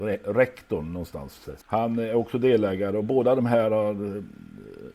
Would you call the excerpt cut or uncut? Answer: cut